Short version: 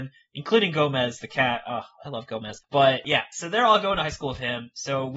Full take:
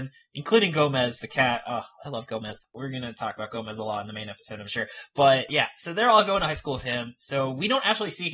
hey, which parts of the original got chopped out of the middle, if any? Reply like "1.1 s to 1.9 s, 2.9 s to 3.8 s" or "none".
2.6 s to 5.1 s